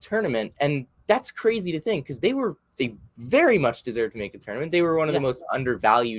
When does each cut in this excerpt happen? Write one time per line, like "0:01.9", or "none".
none